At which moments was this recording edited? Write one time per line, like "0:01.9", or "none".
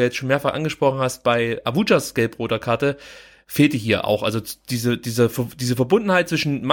none